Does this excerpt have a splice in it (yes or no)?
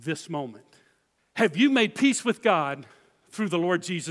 yes